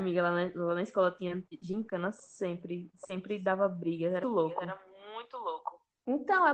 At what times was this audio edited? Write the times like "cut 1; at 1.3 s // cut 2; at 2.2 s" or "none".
cut 1; at 4.2 s

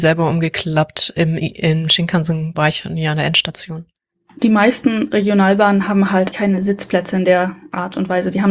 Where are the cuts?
cut 1; at 2.5 s // cut 2; at 6.3 s

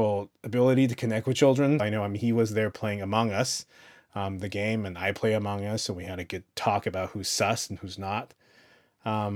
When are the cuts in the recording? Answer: cut 1; at 1.8 s

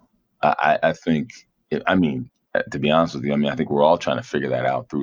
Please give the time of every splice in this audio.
none

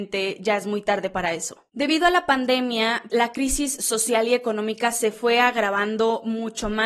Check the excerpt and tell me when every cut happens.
cut 1; at 3.1 s

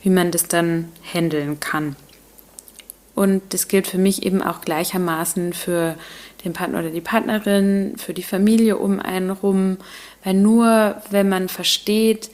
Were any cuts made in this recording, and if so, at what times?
cut 1; at 3.1 s

